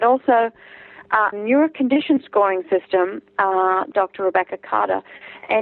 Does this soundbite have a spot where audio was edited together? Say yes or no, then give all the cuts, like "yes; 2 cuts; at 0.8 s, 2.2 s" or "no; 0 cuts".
yes; 2 cuts; at 1.3 s, 3.9 s